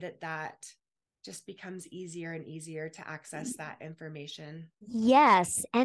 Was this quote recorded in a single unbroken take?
yes; 0 cuts

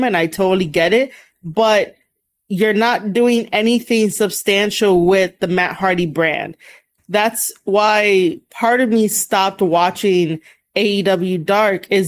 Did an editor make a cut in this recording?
yes; 1 cut; at 7.0 s

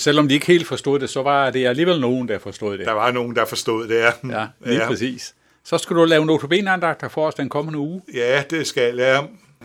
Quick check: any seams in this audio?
no; 0 cuts

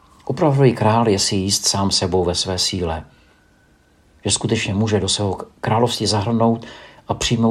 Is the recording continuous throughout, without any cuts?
yes; 0 cuts

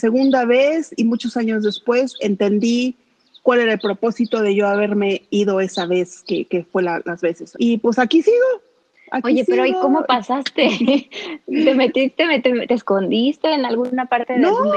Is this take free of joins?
no; 1 cut; at 7.5 s

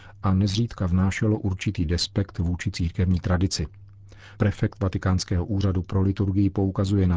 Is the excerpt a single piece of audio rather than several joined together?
no; 1 cut; at 4.3 s

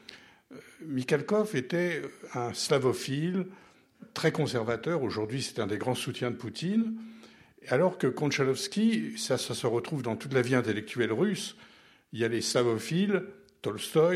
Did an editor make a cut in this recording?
no; 0 cuts

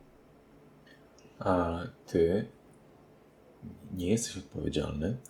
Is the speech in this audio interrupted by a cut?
no; 0 cuts

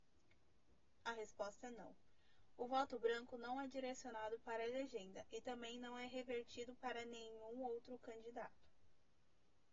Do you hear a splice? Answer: yes; 1 cut; at 1.0 s

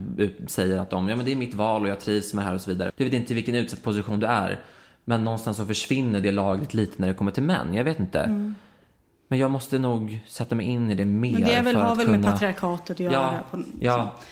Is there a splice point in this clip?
yes; 1 cut; at 2.9 s

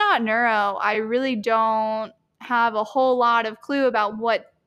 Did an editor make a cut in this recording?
no; 0 cuts

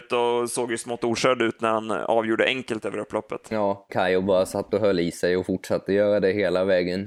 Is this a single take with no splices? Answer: no; 1 cut; at 3.9 s

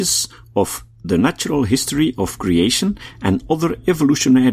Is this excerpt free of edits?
yes; 0 cuts

